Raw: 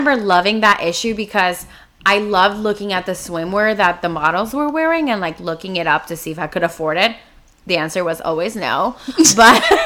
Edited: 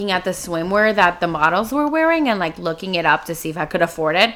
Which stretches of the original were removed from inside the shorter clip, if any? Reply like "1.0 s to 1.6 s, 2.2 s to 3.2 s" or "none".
none